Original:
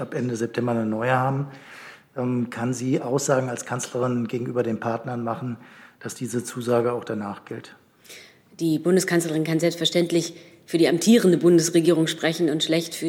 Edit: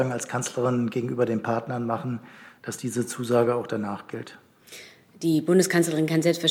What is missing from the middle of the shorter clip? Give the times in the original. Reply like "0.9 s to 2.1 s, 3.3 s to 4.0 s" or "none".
none